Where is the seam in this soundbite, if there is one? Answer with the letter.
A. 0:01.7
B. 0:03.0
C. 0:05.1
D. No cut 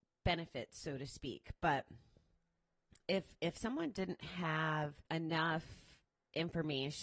C